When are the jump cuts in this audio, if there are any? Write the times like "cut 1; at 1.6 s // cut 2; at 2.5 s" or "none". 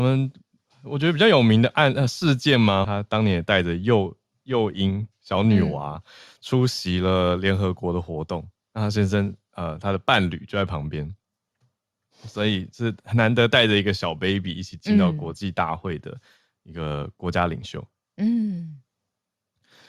cut 1; at 2.8 s